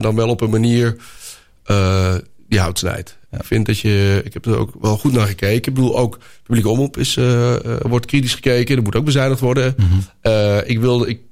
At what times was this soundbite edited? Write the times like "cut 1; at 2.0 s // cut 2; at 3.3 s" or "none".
none